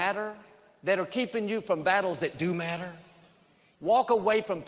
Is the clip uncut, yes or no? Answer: no